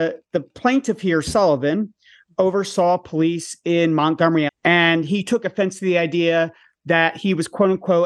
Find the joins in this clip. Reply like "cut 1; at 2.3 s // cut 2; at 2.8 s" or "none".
cut 1; at 4.5 s